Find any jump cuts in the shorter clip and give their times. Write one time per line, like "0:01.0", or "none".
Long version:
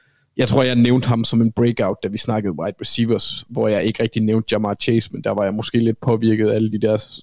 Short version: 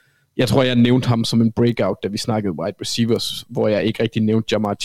none